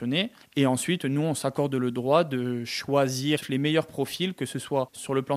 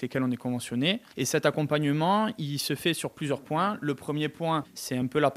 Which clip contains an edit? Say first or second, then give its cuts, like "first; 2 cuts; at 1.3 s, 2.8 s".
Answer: second; 1 cut; at 1.1 s